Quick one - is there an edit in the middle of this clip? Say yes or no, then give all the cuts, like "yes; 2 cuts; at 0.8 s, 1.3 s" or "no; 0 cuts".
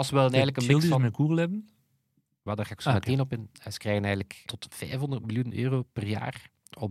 yes; 1 cut; at 4.5 s